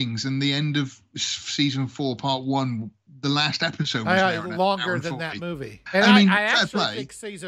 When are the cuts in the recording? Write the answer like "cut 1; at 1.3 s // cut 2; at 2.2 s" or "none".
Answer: cut 1; at 5.9 s

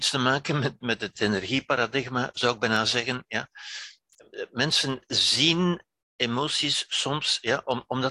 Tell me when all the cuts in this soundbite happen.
cut 1; at 1.1 s

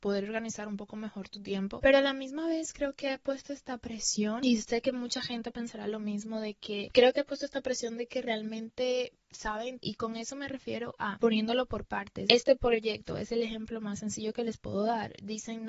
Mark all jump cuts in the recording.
cut 1; at 6.9 s // cut 2; at 9.8 s // cut 3; at 12.3 s

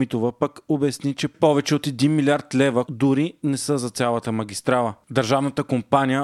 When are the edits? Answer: cut 1; at 2.8 s

